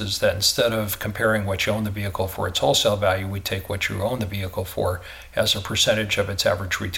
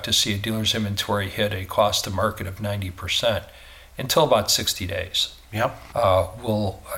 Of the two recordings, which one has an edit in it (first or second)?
second